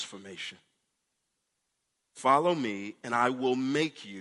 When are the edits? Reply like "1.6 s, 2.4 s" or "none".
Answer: none